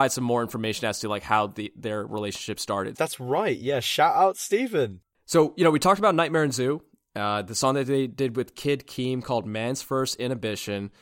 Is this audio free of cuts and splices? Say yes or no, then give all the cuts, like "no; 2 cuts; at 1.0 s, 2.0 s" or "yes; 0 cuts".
no; 1 cut; at 2.9 s